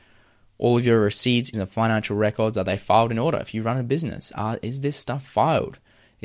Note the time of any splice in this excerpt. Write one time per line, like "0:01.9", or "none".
0:01.5